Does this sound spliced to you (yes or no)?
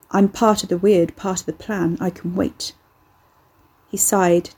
no